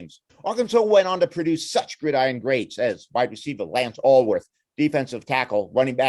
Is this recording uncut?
yes; 0 cuts

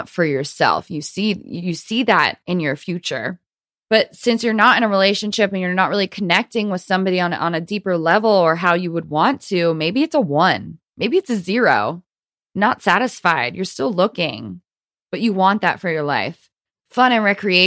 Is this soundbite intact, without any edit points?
yes; 0 cuts

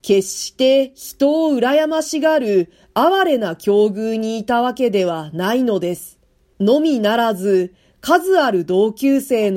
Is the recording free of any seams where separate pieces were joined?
no; 1 cut; at 6.5 s

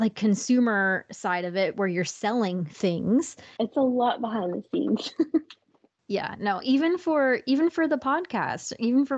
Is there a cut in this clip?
yes; 1 cut; at 3.6 s

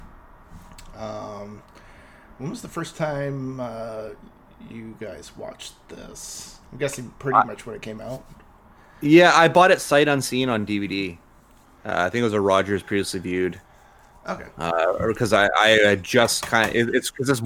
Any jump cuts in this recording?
no; 0 cuts

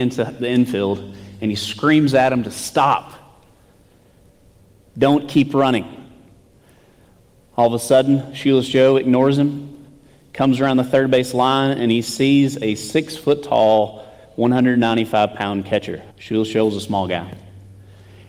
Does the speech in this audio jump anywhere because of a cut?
yes; 1 cut; at 16.1 s

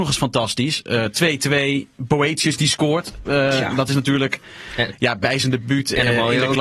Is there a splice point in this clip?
no; 0 cuts

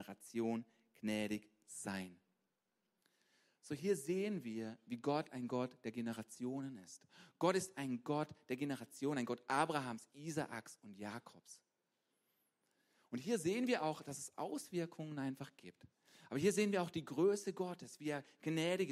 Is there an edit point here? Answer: no; 0 cuts

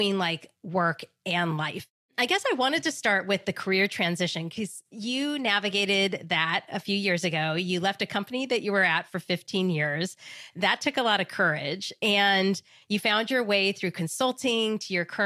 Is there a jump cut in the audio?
no; 0 cuts

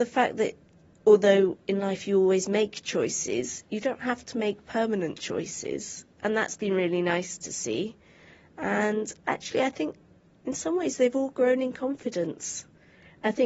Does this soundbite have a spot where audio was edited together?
no; 0 cuts

